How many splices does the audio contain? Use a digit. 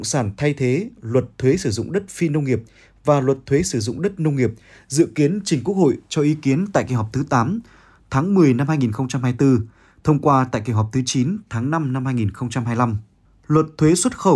0